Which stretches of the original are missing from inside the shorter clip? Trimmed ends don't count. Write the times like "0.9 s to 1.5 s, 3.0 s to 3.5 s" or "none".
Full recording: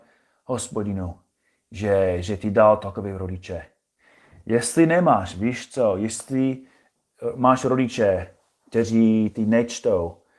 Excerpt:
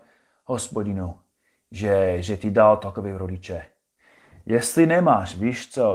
none